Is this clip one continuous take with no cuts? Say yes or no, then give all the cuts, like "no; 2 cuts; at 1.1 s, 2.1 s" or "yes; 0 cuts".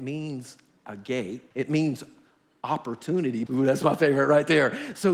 no; 2 cuts; at 1.5 s, 3.5 s